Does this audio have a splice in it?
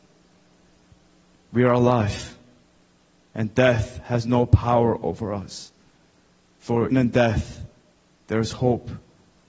yes; 1 cut; at 6.9 s

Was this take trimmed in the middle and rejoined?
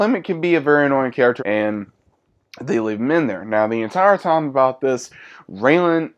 yes; 1 cut; at 1.4 s

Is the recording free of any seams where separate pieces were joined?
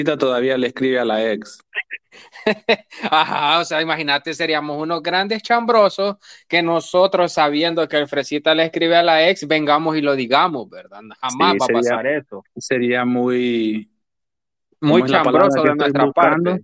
yes; 0 cuts

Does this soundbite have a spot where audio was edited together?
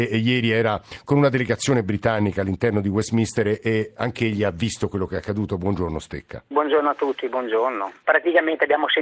yes; 1 cut; at 6.5 s

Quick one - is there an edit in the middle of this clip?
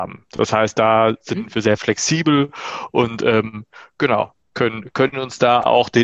yes; 1 cut; at 4.4 s

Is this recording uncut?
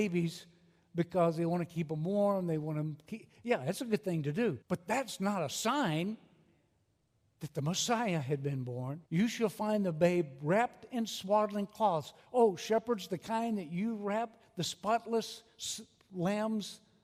no; 2 cuts; at 4.6 s, 9.1 s

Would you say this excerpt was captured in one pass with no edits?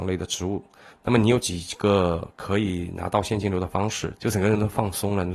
no; 1 cut; at 4.2 s

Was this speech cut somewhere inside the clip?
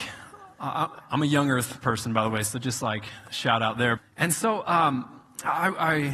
yes; 1 cut; at 4.0 s

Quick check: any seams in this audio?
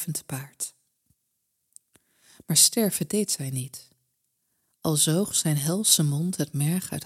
no; 0 cuts

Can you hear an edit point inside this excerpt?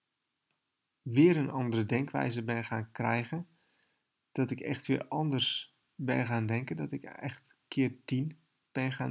no; 0 cuts

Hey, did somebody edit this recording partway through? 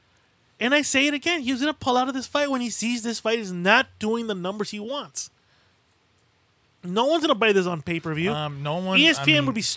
no; 0 cuts

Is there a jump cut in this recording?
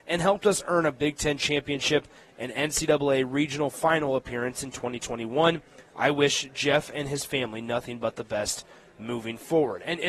no; 0 cuts

